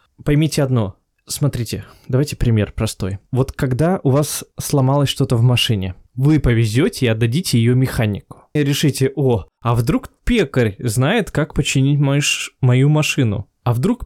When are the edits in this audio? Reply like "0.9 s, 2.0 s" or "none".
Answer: 6.1 s, 8.6 s

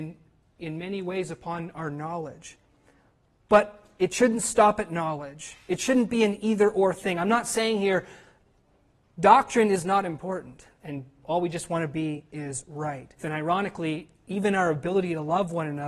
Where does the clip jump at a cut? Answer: 10.7 s, 13.2 s

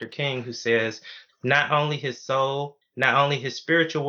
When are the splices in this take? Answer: 1.3 s, 2.8 s

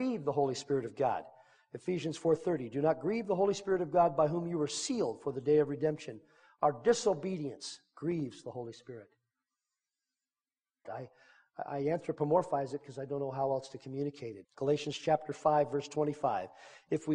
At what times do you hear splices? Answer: 10.8 s, 14.4 s

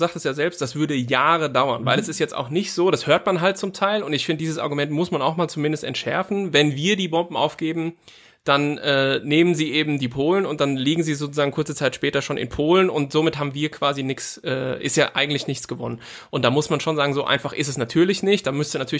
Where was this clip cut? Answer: none

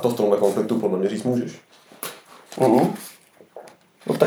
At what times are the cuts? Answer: 2.5 s

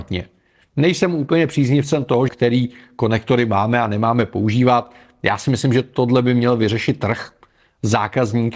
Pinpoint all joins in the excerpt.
2.3 s

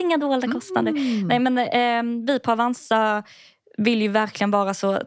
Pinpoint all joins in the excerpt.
none

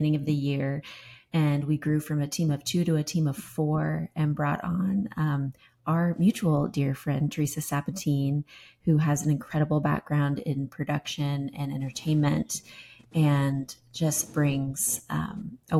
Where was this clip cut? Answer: none

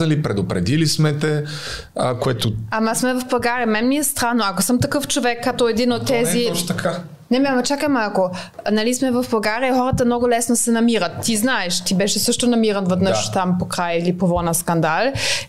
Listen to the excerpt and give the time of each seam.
none

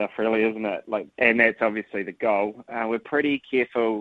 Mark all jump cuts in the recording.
none

